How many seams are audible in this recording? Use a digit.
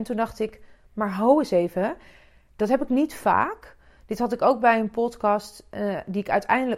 0